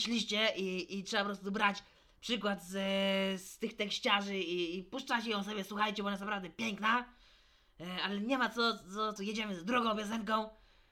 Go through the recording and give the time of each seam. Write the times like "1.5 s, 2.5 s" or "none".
9.2 s

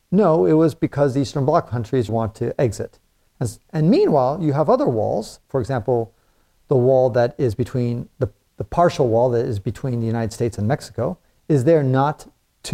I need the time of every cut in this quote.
2.1 s

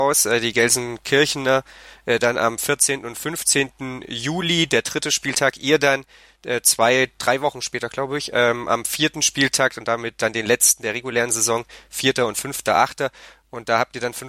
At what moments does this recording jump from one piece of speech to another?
none

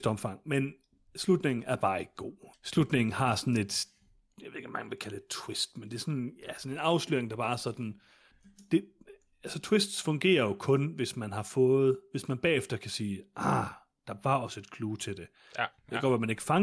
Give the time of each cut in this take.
2.5 s

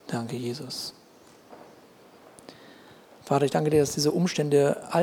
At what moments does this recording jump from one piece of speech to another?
3.2 s

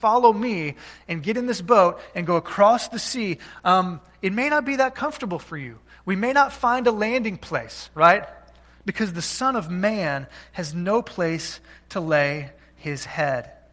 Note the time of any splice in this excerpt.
none

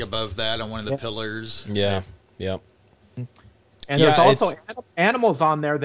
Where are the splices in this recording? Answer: none

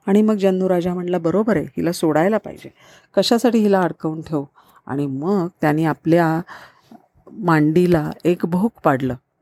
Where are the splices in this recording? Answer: none

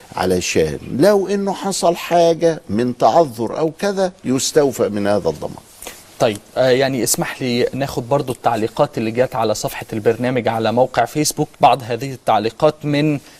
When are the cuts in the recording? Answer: 11.5 s

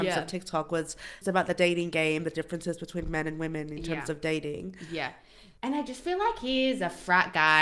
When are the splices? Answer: 1.2 s

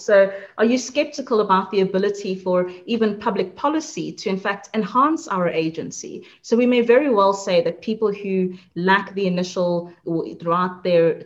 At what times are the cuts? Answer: 10.0 s

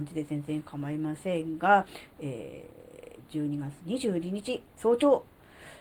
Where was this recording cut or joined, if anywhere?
4.8 s

